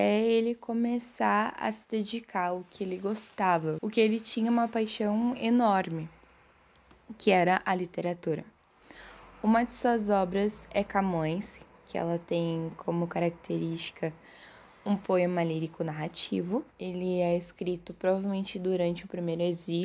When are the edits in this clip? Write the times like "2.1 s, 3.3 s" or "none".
3.8 s, 16.7 s